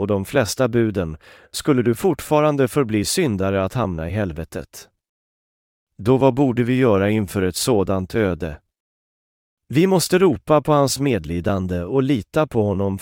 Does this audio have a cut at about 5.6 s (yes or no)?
no